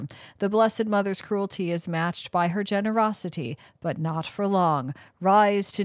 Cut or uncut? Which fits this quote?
uncut